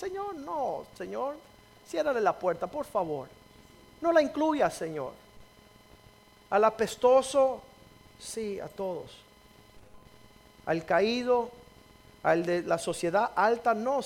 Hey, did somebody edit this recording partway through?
no; 0 cuts

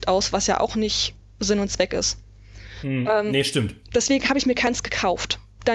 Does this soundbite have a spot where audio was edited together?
no; 0 cuts

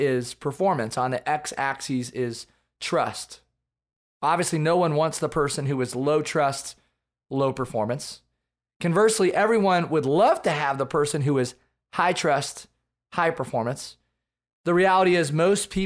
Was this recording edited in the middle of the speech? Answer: no; 0 cuts

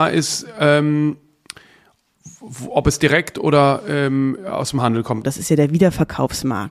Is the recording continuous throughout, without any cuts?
no; 1 cut; at 5.2 s

